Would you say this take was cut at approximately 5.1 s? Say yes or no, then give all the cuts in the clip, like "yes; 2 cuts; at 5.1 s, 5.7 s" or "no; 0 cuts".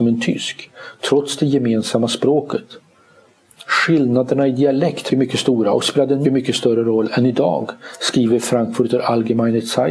yes; 2 cuts; at 5.1 s, 6.2 s